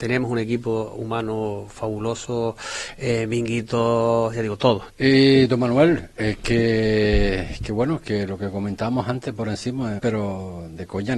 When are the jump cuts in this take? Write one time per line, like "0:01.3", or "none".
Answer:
0:04.9
0:10.0